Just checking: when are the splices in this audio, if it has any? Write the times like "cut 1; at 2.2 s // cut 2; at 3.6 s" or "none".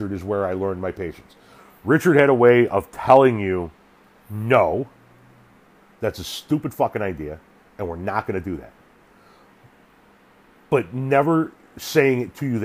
none